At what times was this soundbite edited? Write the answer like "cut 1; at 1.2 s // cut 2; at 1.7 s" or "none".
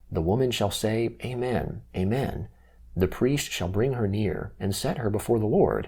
cut 1; at 2.8 s